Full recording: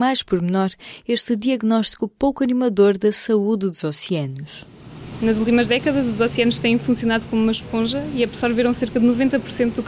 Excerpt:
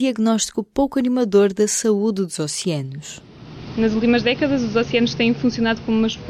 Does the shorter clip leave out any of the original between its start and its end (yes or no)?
no